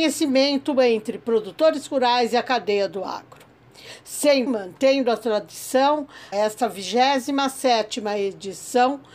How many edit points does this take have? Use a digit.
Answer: 2